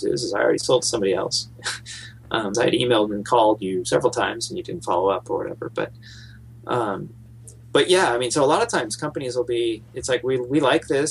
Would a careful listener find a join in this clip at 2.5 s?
yes; 1 cut; at 2.5 s

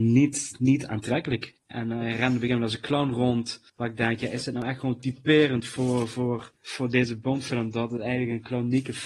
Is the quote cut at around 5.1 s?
no; 3 cuts; at 1.6 s, 3.7 s, 6.6 s

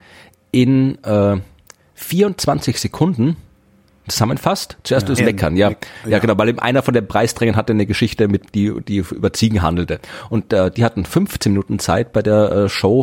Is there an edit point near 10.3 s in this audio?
no; 1 cut; at 5.2 s

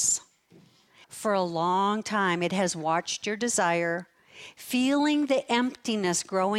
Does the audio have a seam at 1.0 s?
yes; 1 cut; at 1.0 s

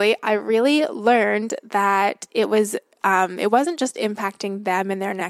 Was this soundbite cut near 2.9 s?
no; 0 cuts

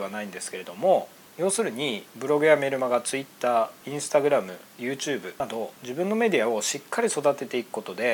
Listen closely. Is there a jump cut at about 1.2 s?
no; 1 cut; at 5.8 s

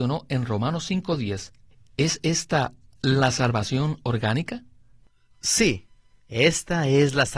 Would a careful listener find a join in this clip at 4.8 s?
no; 1 cut; at 6.2 s

